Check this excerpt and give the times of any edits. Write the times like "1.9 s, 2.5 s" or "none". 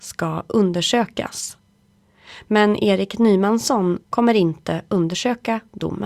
4.0 s